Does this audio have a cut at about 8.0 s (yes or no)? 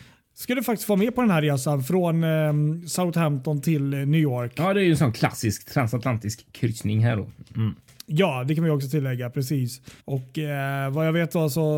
no